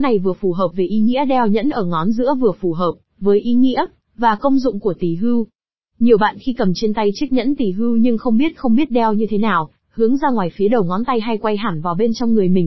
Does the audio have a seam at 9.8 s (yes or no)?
yes